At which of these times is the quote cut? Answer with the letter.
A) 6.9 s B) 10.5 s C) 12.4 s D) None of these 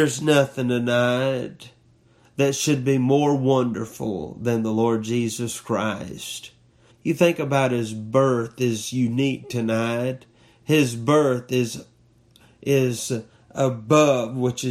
A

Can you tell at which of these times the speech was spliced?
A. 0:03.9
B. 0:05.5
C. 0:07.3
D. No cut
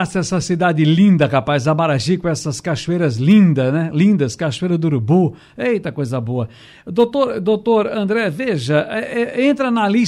D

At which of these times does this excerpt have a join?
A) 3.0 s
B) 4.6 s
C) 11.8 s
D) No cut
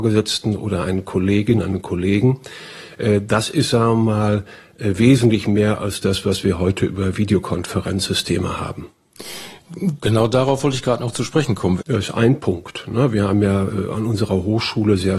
C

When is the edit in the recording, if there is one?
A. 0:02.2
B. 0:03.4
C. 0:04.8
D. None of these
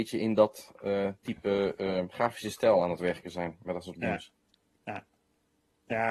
D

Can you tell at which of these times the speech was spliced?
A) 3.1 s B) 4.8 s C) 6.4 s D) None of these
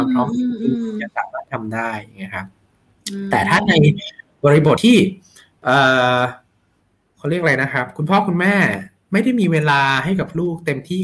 B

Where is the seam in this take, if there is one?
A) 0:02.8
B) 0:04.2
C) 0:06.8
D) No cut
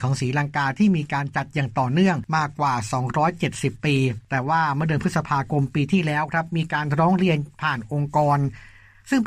D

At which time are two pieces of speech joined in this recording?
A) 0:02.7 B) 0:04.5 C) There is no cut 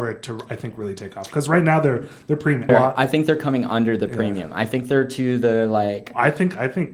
A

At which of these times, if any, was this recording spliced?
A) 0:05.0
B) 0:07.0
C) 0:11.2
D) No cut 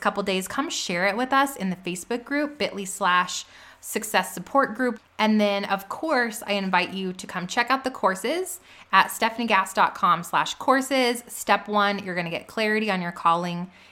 A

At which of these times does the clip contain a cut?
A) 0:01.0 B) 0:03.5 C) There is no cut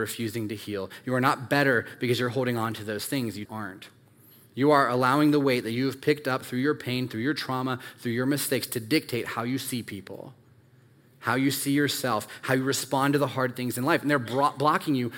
B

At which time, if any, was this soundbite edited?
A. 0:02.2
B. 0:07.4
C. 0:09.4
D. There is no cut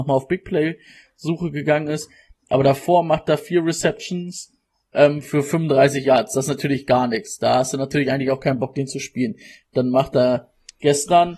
D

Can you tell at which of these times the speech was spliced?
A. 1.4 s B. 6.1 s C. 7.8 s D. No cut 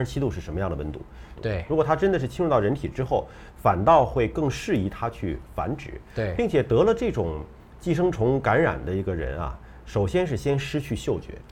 A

